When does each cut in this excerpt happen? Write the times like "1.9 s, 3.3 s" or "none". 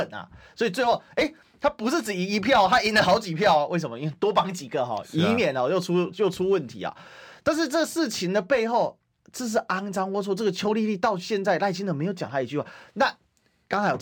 none